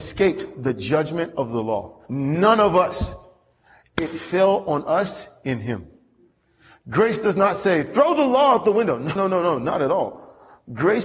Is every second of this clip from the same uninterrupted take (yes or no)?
no